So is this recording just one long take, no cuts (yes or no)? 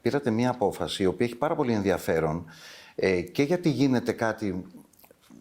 yes